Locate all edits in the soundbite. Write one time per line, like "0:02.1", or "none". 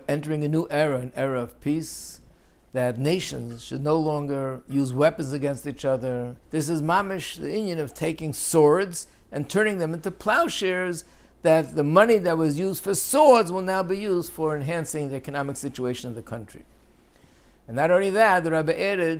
0:06.4

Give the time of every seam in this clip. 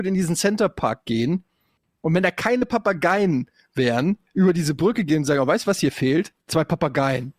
0:06.4

